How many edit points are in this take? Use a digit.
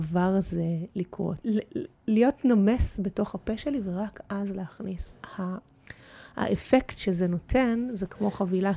1